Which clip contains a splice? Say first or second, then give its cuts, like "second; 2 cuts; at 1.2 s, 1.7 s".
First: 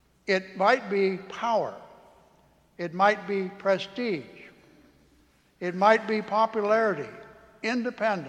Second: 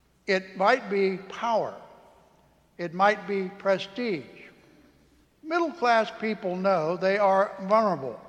second; 1 cut; at 5.3 s